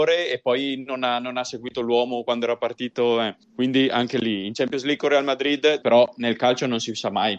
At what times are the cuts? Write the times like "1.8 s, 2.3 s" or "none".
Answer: 3.4 s, 5.8 s